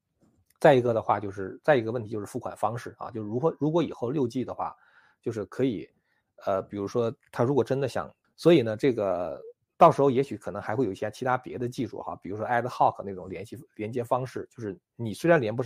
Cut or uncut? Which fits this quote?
cut